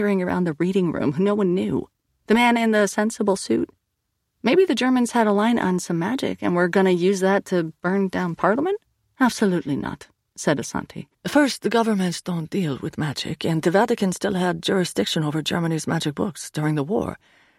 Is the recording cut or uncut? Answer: uncut